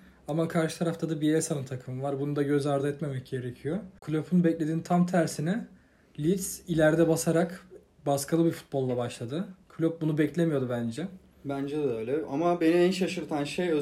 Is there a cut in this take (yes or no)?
no